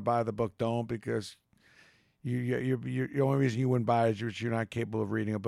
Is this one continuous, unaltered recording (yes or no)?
yes